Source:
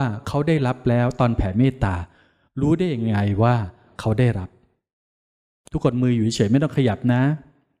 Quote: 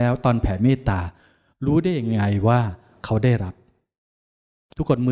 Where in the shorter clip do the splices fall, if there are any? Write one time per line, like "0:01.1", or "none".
none